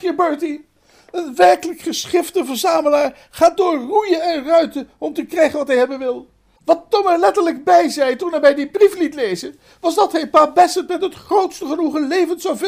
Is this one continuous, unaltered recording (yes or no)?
yes